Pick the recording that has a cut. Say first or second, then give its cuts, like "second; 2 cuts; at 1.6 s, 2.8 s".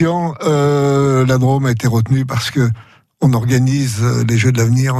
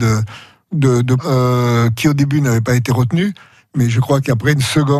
second; 1 cut; at 1.2 s